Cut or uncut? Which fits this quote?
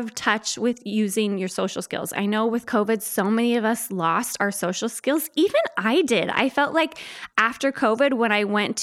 uncut